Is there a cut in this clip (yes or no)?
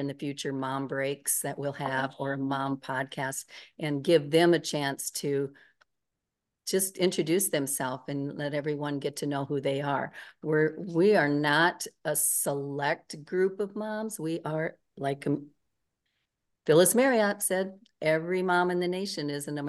no